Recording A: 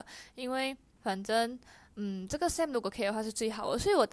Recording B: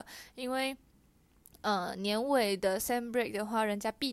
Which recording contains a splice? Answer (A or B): A